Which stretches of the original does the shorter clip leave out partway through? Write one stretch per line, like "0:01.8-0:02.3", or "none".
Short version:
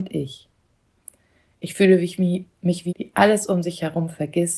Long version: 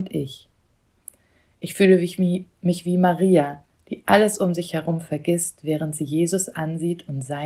0:02.9-0:03.8